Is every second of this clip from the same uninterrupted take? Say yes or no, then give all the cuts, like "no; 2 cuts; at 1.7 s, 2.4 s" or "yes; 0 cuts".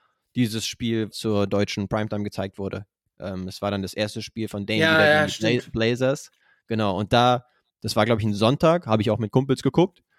no; 1 cut; at 1.1 s